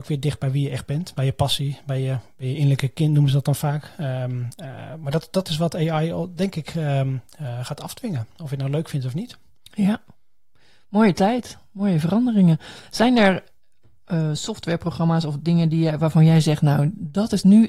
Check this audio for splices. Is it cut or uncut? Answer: uncut